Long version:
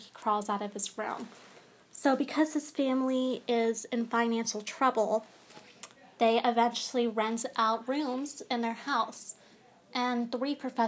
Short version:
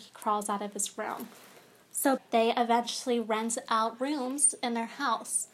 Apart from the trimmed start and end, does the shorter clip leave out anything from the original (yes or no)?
yes